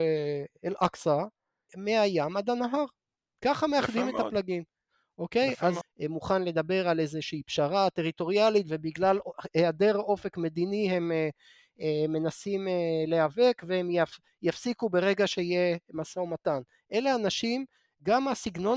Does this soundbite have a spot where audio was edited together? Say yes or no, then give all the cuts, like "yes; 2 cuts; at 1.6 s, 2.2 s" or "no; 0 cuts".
yes; 2 cuts; at 1.7 s, 5.8 s